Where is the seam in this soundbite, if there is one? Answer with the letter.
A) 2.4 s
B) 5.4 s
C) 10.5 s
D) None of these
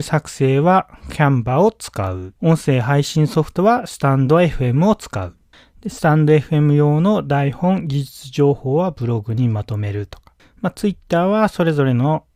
A